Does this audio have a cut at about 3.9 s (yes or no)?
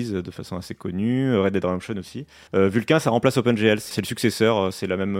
yes